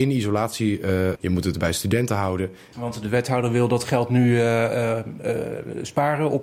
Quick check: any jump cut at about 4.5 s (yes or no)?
no